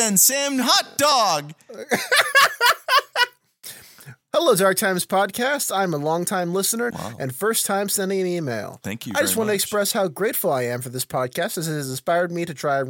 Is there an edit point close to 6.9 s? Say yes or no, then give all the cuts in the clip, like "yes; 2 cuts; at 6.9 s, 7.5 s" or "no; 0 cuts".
yes; 1 cut; at 6.9 s